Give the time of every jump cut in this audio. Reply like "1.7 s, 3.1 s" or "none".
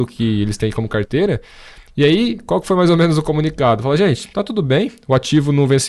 none